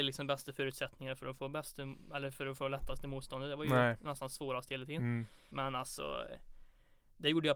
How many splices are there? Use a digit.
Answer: 1